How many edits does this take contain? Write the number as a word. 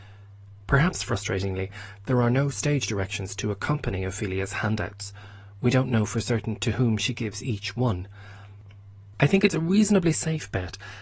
one